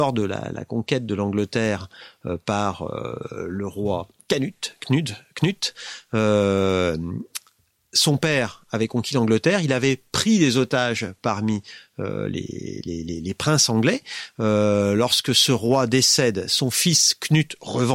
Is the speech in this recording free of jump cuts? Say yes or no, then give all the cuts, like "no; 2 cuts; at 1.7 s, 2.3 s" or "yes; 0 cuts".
yes; 0 cuts